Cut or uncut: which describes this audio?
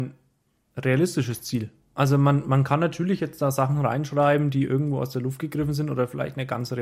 uncut